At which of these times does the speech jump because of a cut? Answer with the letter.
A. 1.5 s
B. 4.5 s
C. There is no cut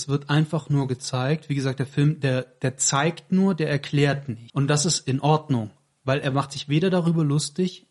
B